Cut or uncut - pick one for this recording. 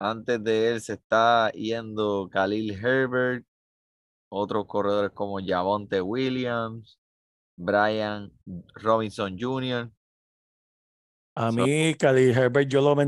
uncut